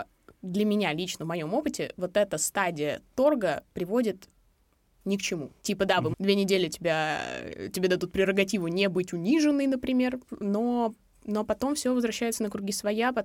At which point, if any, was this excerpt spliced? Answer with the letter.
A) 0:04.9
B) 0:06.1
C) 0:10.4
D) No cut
B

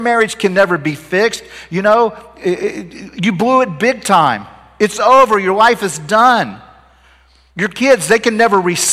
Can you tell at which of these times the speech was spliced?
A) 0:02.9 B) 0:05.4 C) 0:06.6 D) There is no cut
D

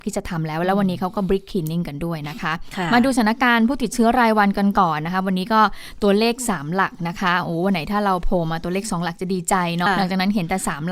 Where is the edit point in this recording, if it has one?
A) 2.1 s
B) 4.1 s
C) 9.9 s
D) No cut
C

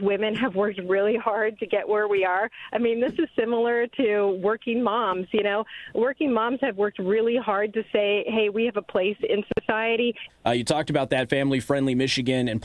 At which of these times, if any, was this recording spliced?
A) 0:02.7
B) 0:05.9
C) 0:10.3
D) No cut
C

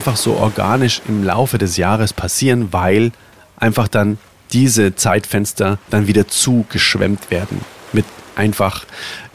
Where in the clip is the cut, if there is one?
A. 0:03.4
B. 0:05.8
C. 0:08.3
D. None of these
B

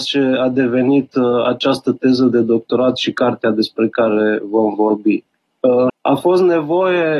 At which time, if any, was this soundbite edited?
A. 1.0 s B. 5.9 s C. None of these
B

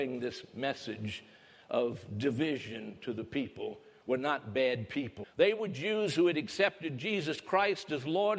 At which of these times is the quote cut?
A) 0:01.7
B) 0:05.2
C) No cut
B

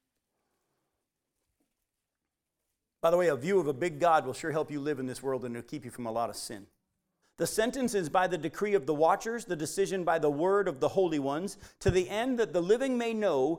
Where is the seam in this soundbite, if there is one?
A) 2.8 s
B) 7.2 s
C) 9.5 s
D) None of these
B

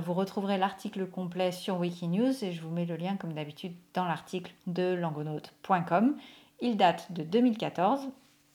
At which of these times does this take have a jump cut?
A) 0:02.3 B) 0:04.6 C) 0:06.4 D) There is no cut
B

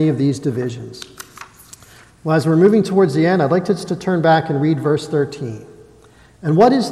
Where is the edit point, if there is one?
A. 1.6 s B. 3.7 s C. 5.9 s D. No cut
D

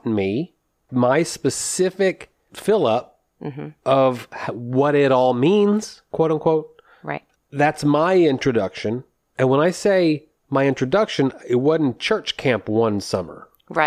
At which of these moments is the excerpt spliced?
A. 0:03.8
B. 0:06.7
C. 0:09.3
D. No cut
D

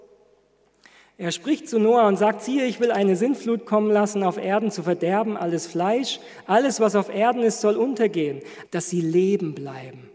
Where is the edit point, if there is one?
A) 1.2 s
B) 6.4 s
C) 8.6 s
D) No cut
C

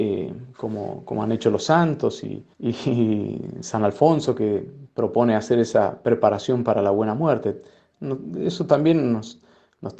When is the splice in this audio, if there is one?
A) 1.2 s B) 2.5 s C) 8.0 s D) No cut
B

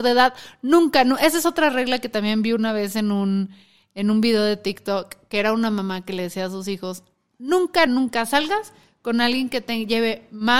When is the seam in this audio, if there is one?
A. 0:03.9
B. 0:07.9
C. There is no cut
B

